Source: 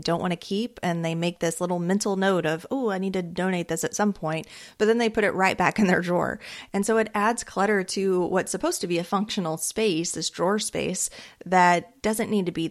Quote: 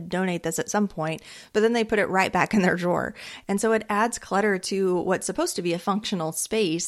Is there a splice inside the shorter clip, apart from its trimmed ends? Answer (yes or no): no